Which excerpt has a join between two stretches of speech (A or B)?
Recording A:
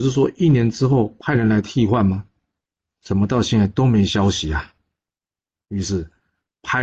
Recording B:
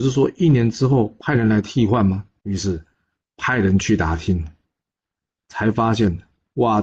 B